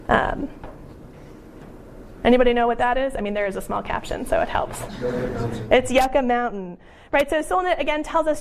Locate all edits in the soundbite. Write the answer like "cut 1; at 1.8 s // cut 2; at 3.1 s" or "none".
none